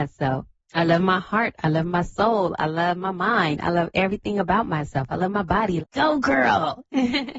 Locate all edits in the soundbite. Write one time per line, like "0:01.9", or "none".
0:05.8